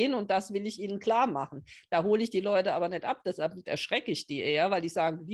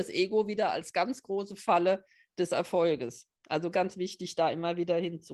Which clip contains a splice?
second; 1 cut; at 3.7 s

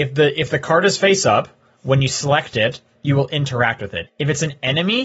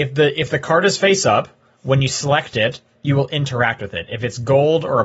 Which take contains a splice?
first; 1 cut; at 4.1 s

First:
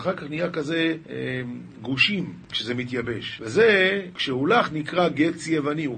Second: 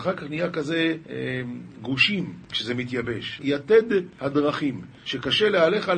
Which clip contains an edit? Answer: second; 1 cut; at 3.4 s

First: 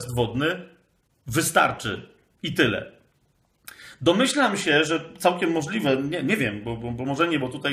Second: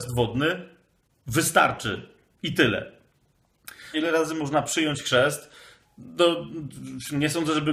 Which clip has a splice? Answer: second; 1 cut; at 3.9 s

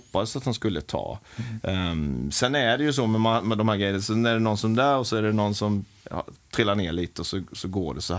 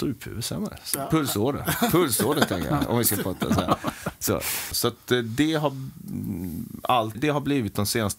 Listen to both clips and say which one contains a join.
second; 2 cuts; at 4.7 s, 7.1 s

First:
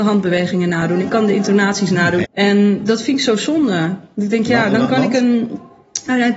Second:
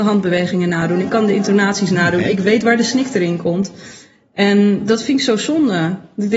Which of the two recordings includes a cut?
first; 1 cut; at 2.2 s

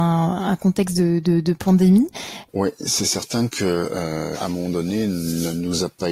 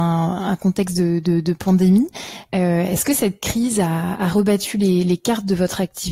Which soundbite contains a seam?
first; 2 cuts; at 2.5 s, 4.3 s

